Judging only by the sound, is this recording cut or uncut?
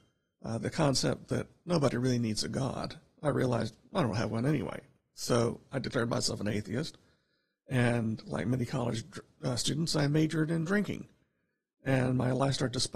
uncut